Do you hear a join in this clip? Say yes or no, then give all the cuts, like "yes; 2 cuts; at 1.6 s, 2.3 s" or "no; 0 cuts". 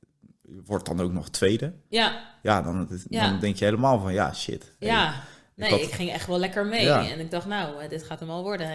no; 0 cuts